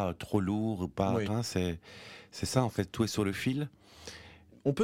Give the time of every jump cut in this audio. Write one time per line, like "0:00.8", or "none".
0:01.3